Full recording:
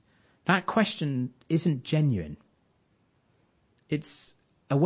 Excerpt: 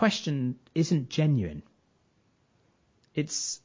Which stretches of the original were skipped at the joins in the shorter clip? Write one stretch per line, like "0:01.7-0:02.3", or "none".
none